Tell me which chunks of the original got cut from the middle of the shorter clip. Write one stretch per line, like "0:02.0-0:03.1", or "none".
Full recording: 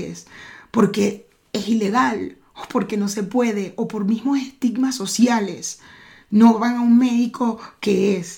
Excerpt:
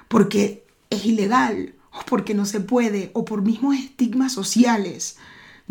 none